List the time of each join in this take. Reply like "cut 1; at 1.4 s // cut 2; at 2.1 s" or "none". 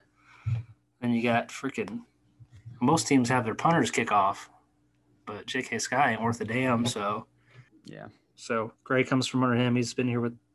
cut 1; at 7.7 s // cut 2; at 8.8 s